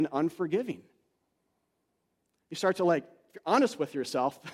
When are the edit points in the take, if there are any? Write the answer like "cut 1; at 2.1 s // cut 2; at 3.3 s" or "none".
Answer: none